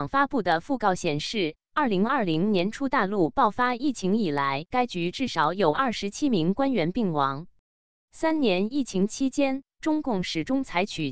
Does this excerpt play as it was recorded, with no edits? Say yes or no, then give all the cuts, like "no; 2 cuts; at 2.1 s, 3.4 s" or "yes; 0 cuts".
no; 2 cuts; at 4.7 s, 7.9 s